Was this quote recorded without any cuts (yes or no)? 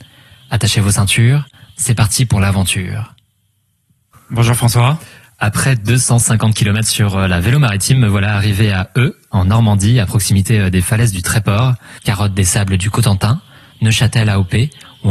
no